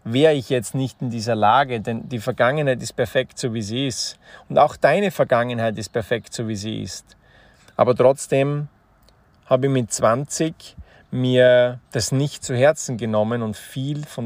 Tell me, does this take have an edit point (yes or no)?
yes